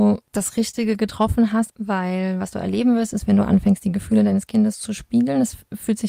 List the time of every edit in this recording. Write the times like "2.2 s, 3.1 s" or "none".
1.7 s